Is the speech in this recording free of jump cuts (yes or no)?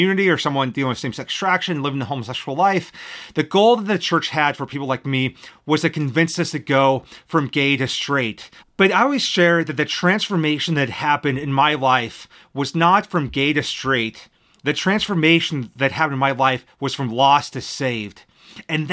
no